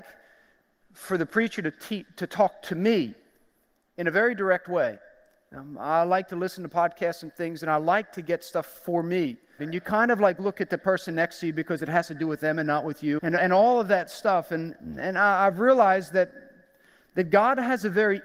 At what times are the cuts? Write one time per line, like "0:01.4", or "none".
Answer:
0:09.6
0:13.2